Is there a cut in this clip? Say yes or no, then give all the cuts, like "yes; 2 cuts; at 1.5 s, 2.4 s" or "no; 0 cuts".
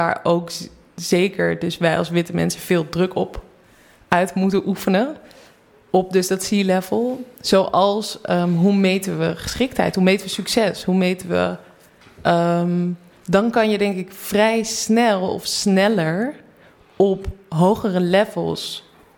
no; 0 cuts